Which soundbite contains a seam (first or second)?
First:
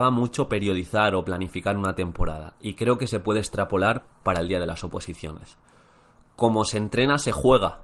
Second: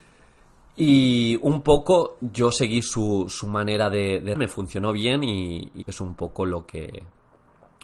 second